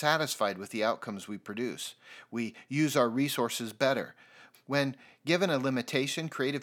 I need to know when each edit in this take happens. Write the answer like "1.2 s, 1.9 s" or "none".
4.5 s